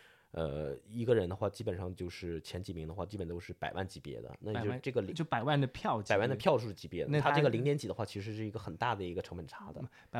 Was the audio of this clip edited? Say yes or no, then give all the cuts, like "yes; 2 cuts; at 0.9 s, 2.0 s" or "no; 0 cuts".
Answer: no; 0 cuts